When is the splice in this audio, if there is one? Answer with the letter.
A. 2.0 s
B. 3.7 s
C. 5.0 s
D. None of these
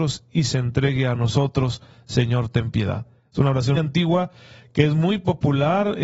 B